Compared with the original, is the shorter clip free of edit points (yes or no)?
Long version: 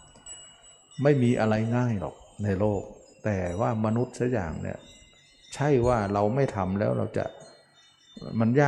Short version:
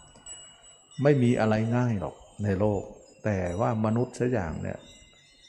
yes